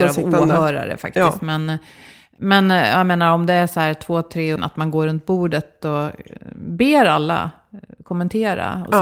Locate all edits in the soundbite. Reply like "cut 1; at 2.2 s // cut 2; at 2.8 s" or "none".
cut 1; at 4.6 s

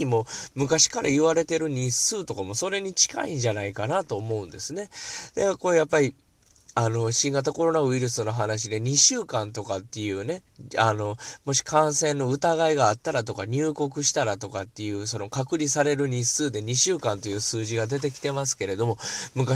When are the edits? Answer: none

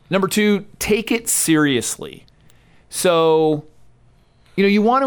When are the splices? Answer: none

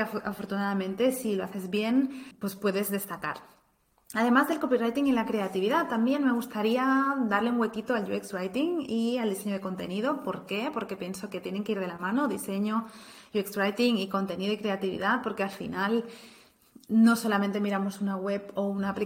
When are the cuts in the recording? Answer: none

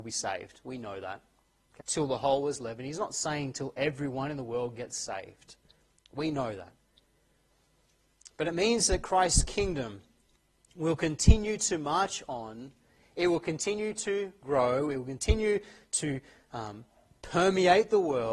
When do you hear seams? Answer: cut 1; at 1.8 s

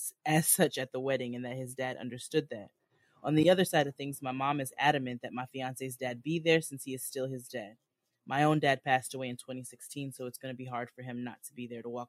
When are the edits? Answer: none

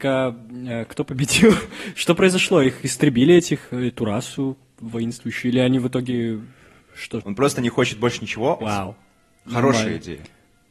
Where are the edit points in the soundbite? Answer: cut 1; at 7.2 s // cut 2; at 8.6 s

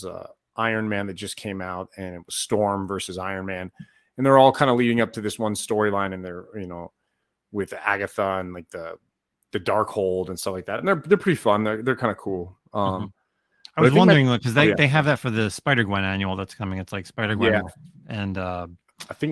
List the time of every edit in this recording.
none

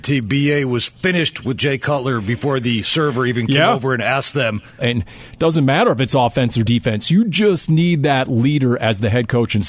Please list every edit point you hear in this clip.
cut 1; at 4.8 s

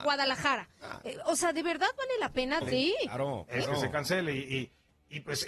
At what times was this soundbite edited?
cut 1; at 2.6 s

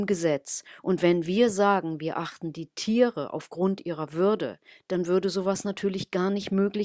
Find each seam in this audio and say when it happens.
none

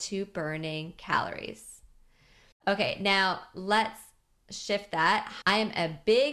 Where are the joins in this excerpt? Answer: cut 1; at 2.5 s // cut 2; at 5.4 s

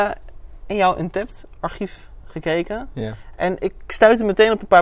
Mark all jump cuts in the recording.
none

